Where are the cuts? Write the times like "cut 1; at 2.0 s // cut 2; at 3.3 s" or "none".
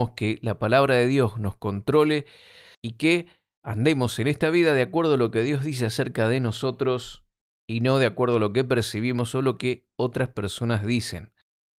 cut 1; at 2.7 s

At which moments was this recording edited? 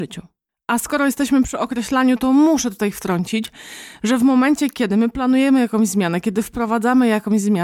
none

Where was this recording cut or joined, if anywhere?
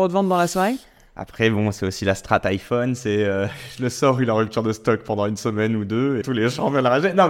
cut 1; at 6.2 s

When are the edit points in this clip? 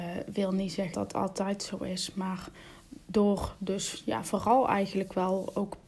cut 1; at 0.9 s

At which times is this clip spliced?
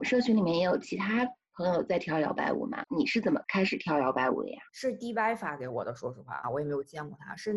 cut 1; at 2.9 s // cut 2; at 6.4 s

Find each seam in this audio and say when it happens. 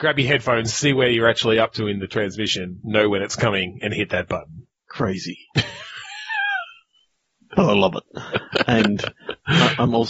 none

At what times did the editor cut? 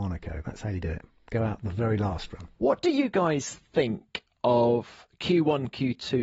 cut 1; at 2.5 s

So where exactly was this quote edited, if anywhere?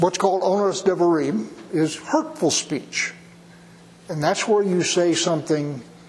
none

